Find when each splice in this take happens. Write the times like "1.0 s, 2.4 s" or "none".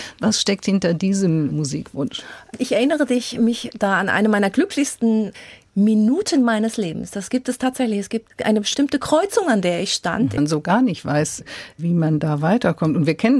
8.3 s, 10.4 s